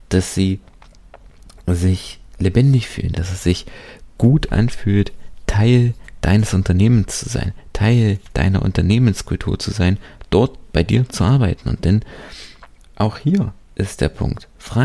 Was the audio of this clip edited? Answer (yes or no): yes